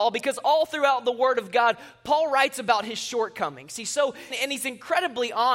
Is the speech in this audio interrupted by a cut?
yes; 1 cut; at 4.3 s

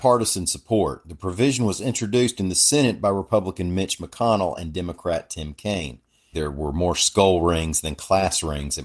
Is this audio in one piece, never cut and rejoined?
no; 1 cut; at 6.3 s

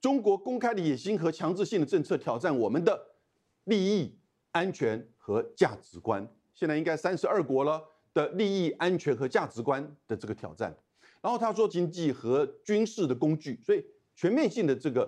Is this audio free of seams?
no; 2 cuts; at 6.5 s, 11.7 s

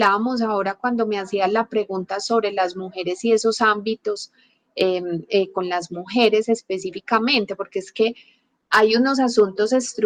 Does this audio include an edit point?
no; 0 cuts

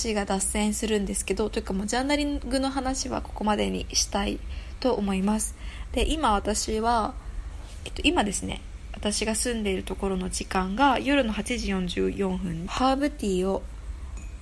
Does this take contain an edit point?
yes; 1 cut; at 12.7 s

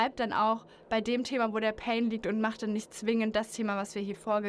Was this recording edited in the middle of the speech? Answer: no; 0 cuts

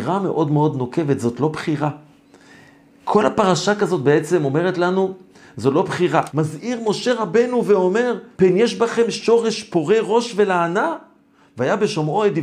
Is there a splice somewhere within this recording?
yes; 2 cuts; at 6.3 s, 8.3 s

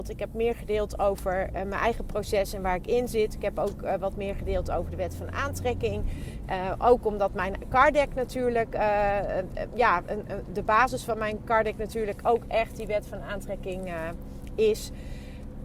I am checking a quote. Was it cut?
no; 0 cuts

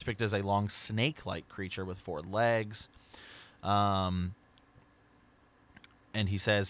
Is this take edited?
no; 0 cuts

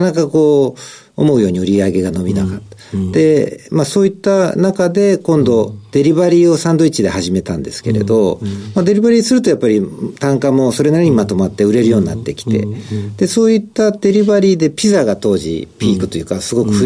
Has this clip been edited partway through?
no; 0 cuts

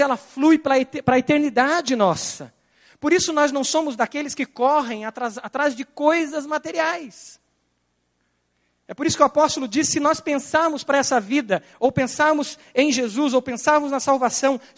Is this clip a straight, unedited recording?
yes; 0 cuts

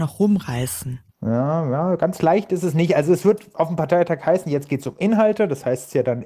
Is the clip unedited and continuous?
yes; 0 cuts

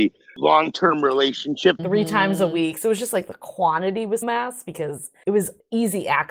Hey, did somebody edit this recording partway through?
yes; 2 cuts; at 1.8 s, 4.2 s

